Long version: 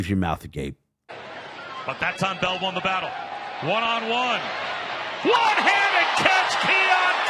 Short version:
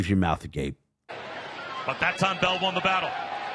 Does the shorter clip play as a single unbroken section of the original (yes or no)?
yes